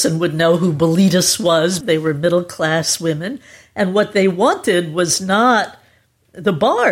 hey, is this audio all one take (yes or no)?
no